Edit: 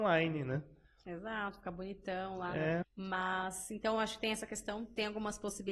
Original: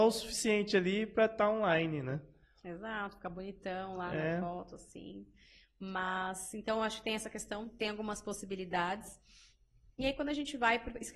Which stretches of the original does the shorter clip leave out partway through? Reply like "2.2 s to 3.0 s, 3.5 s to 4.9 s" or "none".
4.4 s to 5.6 s